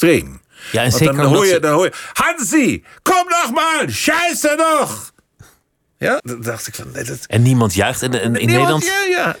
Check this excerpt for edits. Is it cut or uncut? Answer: cut